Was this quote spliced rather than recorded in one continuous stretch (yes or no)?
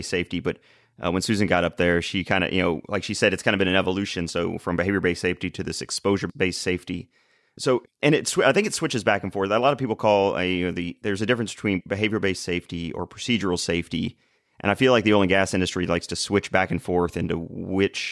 no